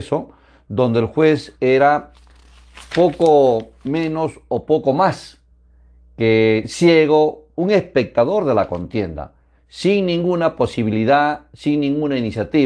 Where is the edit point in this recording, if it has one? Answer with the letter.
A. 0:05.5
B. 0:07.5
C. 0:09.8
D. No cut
B